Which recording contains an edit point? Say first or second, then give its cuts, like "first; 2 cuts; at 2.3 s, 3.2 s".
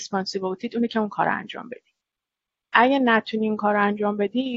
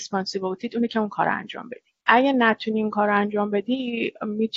second; 1 cut; at 2.0 s